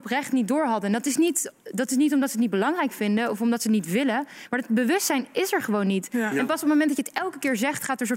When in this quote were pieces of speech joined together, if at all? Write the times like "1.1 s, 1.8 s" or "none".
none